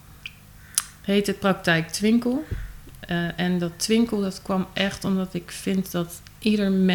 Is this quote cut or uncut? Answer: uncut